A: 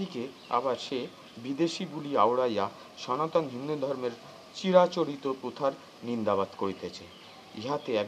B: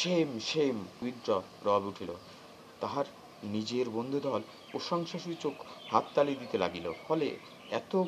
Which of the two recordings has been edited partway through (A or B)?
B